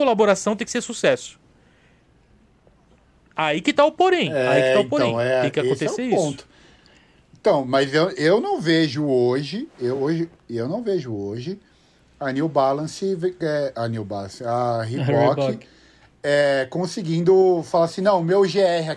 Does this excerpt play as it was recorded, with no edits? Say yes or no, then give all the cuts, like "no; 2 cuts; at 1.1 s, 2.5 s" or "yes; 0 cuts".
yes; 0 cuts